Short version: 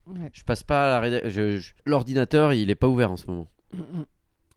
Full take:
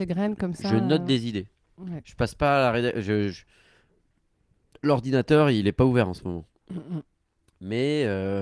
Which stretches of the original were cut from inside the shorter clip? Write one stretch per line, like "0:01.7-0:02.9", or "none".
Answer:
0:03.5-0:04.8